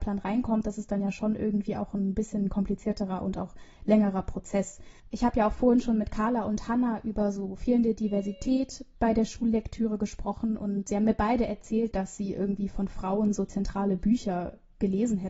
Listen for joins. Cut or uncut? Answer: cut